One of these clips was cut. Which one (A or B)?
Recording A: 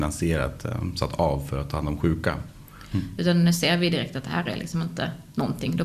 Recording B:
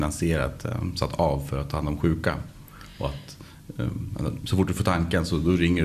A